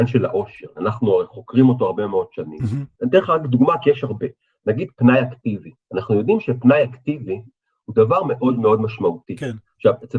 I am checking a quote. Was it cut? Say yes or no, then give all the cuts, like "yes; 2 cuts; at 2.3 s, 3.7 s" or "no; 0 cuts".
no; 0 cuts